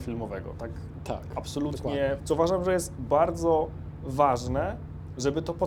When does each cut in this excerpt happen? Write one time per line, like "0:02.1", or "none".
0:02.2